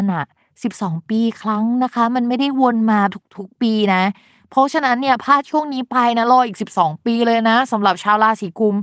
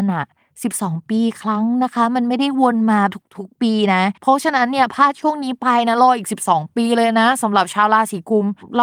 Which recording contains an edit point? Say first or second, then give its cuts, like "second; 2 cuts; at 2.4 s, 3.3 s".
second; 1 cut; at 4.2 s